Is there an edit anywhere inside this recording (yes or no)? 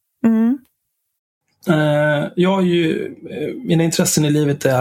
no